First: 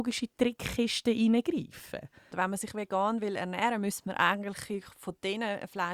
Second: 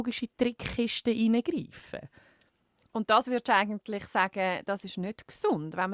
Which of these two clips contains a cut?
first; 1 cut; at 2.3 s

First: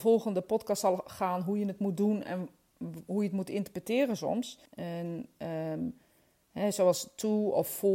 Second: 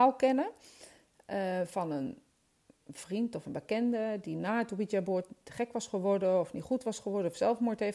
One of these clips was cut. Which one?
first; 1 cut; at 4.7 s

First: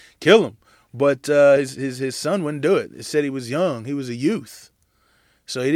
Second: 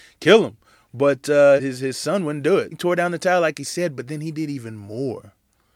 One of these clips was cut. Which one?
second; 2 cuts; at 1.6 s, 2.7 s

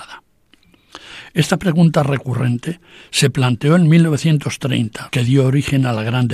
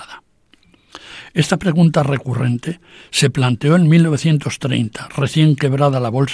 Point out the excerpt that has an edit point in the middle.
first; 1 cut; at 5.1 s

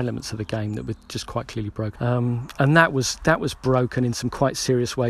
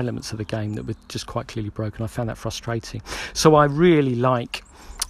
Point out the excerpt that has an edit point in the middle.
first; 1 cut; at 2.0 s

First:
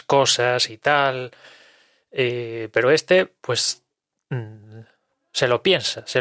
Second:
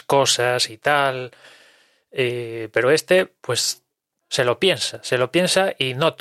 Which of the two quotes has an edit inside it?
second; 1 cut; at 4.2 s

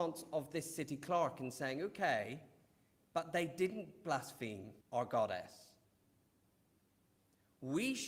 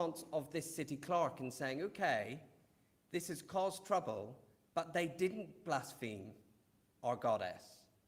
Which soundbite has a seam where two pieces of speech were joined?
first; 2 cuts; at 3.0 s, 4.8 s

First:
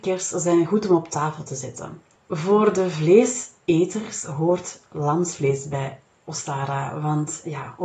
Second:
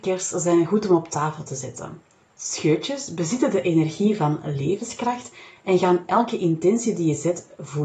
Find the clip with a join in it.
first; 1 cut; at 2.2 s

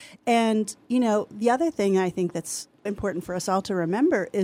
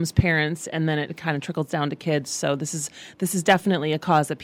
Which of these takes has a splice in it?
first; 1 cut; at 2.9 s

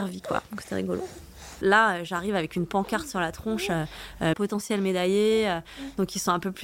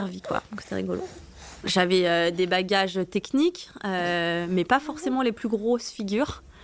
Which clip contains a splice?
first; 2 cuts; at 1.6 s, 4.3 s

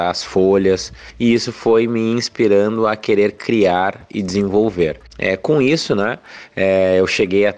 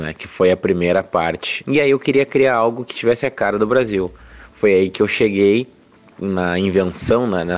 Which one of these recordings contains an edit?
second; 1 cut; at 1.6 s

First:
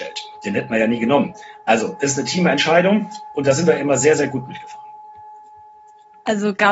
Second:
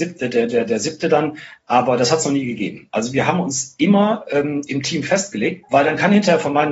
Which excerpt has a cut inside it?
second; 1 cut; at 5.6 s

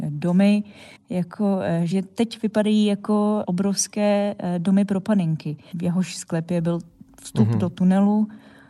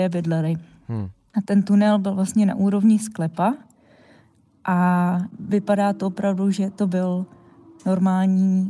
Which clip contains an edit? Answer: first; 2 cuts; at 1.0 s, 5.7 s

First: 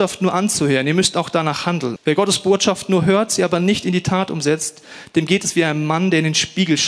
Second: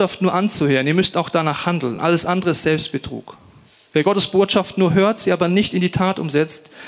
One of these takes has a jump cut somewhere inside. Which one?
first; 1 cut; at 2.0 s

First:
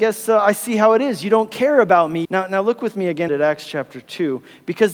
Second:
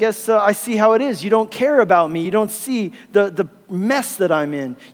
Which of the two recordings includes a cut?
first; 2 cuts; at 2.2 s, 3.3 s

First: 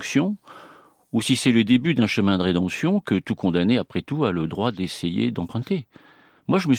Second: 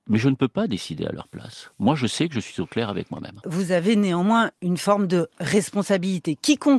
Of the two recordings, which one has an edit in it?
second; 1 cut; at 3.4 s

